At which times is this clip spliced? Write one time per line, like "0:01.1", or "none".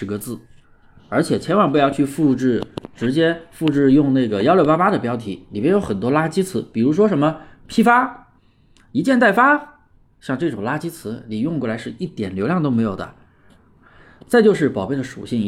none

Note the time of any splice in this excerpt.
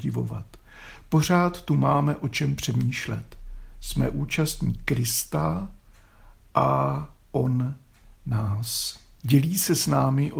0:09.2

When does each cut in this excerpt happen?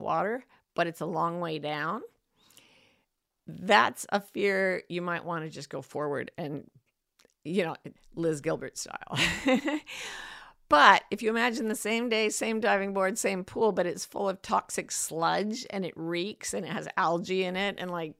0:08.0

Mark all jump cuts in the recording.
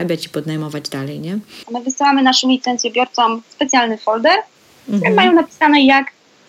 0:01.7

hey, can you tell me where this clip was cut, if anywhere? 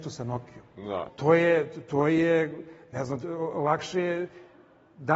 0:01.1

